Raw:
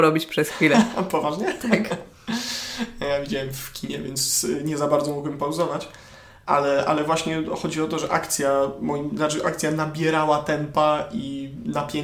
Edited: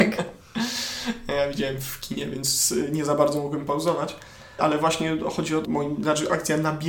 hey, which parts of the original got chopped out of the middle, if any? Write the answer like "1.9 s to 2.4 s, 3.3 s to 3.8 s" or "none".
6.3 s to 6.8 s, 7.9 s to 8.8 s